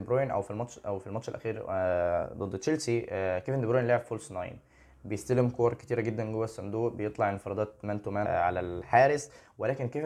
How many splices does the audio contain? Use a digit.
1